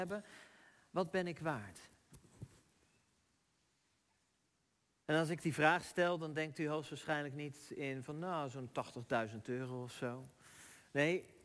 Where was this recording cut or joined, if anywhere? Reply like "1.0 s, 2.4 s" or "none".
none